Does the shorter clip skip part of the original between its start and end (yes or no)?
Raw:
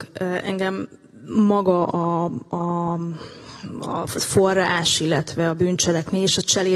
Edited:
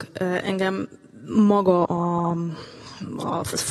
yes